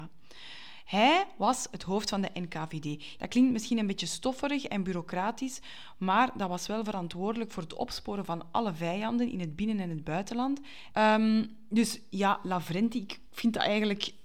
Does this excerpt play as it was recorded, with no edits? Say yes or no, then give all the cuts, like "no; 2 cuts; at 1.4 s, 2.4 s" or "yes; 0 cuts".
no; 2 cuts; at 3.2 s, 10.9 s